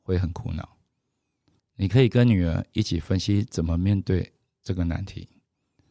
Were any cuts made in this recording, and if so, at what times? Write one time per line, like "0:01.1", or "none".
0:01.6